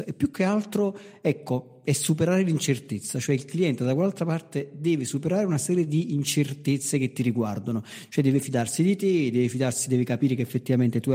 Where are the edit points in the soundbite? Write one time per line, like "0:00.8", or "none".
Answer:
none